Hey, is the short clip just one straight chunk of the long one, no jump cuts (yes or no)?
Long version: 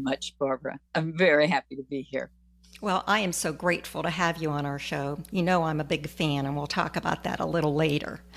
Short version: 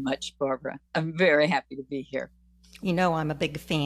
no